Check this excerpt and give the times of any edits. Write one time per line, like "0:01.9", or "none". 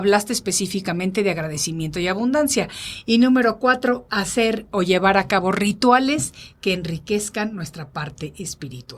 none